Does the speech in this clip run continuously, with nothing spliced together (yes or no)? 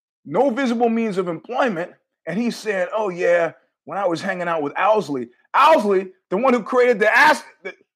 yes